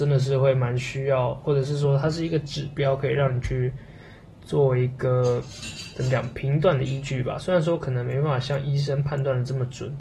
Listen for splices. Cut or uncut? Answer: uncut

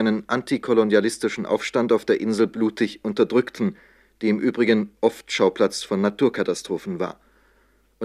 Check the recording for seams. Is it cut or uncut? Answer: uncut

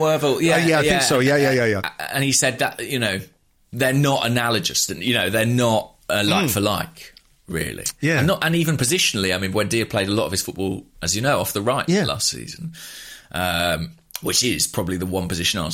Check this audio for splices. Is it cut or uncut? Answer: uncut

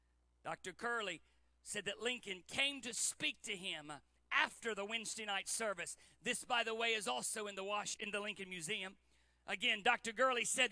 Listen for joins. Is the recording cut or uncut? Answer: uncut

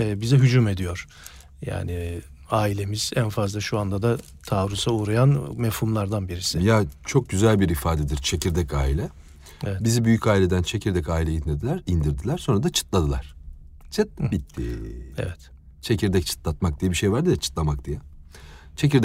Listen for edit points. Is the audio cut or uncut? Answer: uncut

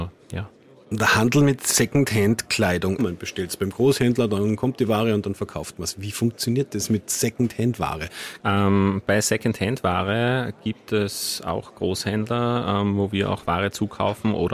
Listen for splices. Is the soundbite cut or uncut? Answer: cut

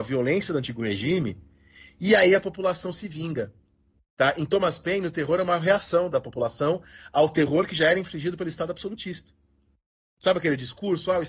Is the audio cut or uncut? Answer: uncut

